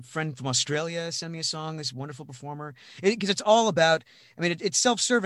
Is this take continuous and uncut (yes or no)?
yes